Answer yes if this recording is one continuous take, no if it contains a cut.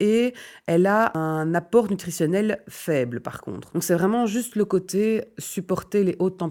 no